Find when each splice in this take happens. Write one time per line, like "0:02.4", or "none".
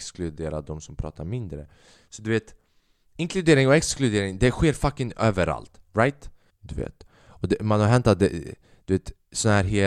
0:06.5